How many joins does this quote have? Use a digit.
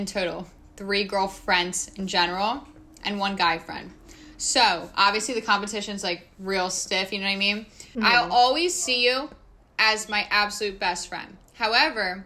1